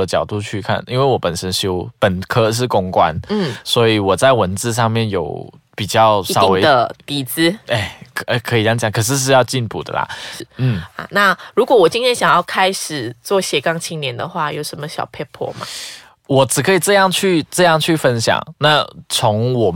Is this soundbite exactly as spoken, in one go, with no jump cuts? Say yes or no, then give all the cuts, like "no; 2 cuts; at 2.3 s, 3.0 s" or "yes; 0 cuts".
no; 1 cut; at 10.4 s